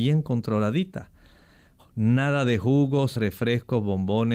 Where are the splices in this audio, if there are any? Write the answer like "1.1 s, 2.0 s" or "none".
3.1 s